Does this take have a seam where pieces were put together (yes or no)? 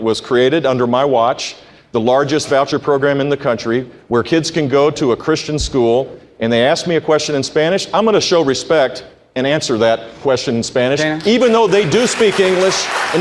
no